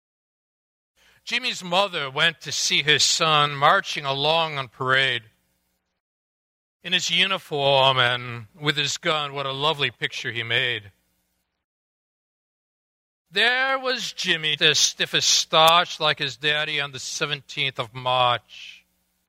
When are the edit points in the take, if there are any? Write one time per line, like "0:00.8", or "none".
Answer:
0:13.2
0:14.6